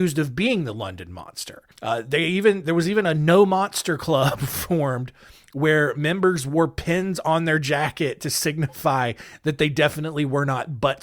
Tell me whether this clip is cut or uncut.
cut